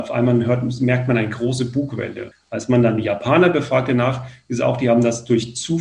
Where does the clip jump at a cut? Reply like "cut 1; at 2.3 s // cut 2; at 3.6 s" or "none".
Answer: cut 1; at 2.3 s

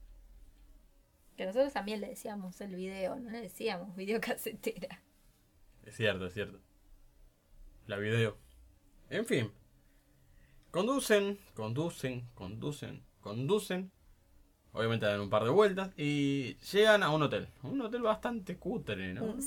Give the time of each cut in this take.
none

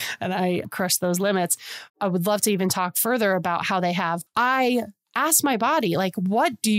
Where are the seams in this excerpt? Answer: cut 1; at 1.9 s // cut 2; at 4.3 s

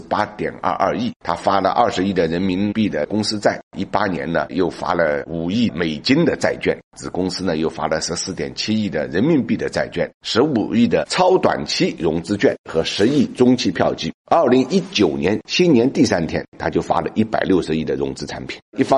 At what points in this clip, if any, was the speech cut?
cut 1; at 1.2 s

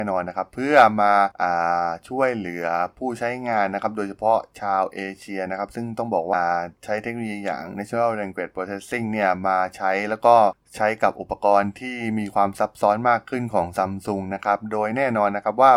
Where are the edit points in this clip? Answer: cut 1; at 6.3 s

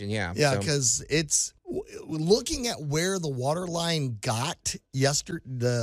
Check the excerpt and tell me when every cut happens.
cut 1; at 1.6 s

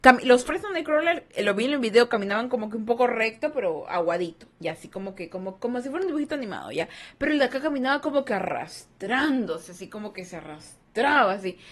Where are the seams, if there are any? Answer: none

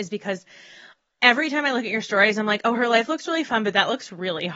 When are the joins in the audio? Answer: none

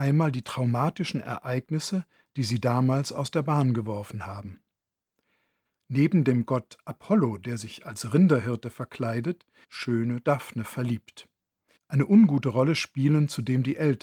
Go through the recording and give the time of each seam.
cut 1; at 9.6 s // cut 2; at 11.8 s

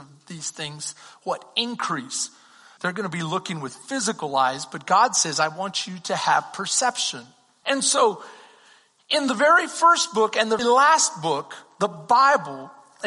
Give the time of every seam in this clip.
cut 1; at 2.8 s // cut 2; at 7.6 s // cut 3; at 10.6 s

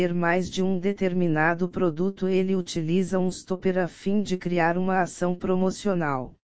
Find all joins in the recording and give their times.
none

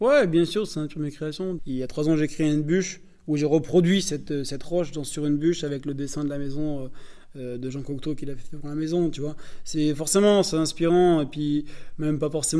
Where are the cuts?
cut 1; at 1.6 s

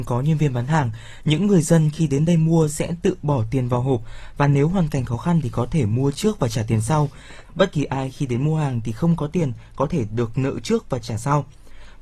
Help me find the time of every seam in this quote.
cut 1; at 7.4 s

